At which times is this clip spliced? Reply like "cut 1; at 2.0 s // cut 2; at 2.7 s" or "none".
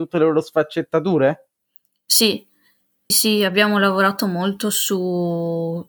cut 1; at 3.1 s